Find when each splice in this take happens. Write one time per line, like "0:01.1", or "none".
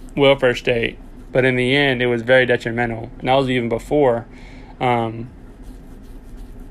0:01.3
0:03.2